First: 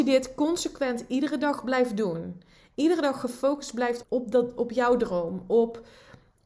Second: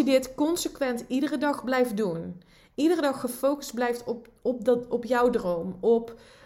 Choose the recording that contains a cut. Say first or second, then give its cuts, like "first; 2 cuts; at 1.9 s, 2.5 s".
first; 1 cut; at 4.0 s